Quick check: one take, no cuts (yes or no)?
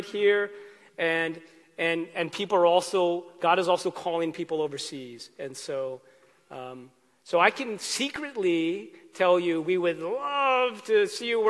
yes